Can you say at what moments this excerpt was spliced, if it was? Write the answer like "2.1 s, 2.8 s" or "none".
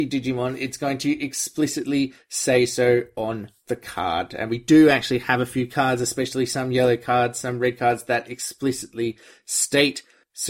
none